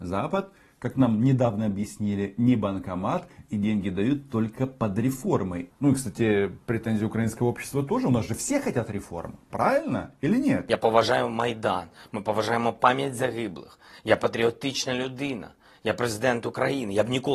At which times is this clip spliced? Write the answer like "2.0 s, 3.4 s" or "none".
5.7 s